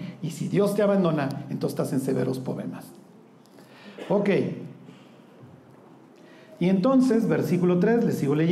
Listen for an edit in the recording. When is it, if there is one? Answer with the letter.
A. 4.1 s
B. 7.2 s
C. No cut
C